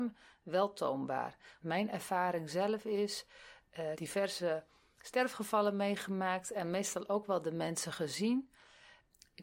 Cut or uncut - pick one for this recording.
cut